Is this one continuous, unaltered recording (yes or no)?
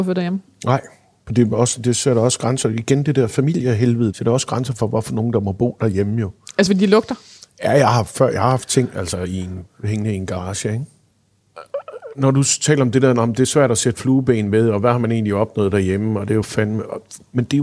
yes